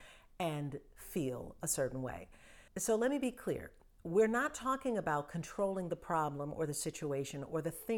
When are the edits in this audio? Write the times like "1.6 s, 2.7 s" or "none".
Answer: 2.7 s